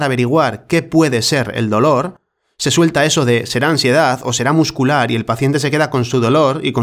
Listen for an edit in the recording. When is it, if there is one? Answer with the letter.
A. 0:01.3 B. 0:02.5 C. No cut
C